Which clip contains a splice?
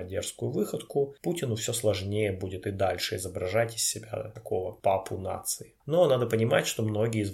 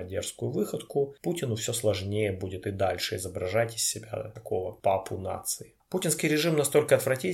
first; 1 cut; at 5.8 s

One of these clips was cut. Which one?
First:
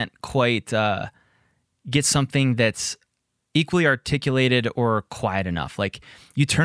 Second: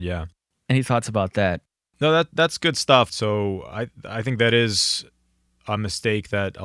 second; 1 cut; at 3.1 s

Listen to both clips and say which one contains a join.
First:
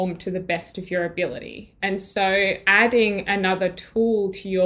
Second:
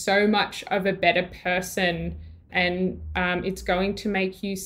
second; 1 cut; at 2.5 s

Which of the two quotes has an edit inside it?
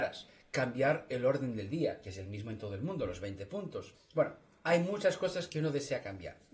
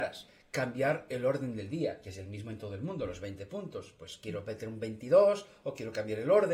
first; 1 cut; at 3.9 s

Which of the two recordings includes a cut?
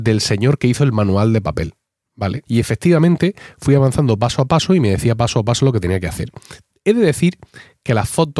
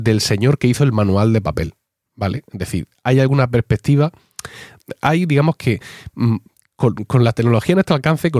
first; 1 cut; at 2.4 s

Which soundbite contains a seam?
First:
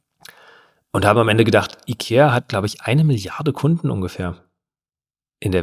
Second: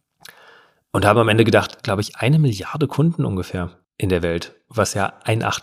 second; 2 cuts; at 1.8 s, 3.8 s

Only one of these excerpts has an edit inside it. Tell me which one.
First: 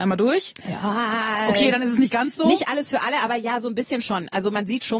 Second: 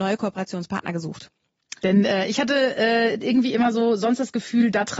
second; 1 cut; at 1.8 s

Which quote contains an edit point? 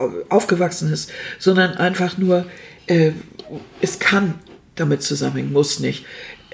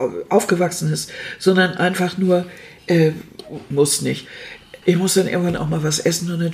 second; 2 cuts; at 3.7 s, 4.8 s

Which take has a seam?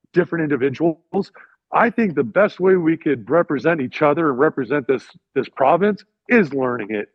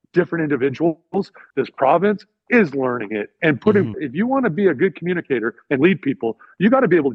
second; 2 cuts; at 1.5 s, 3.9 s

